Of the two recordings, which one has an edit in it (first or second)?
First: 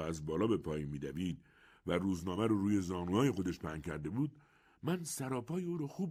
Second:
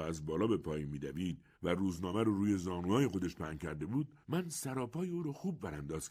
second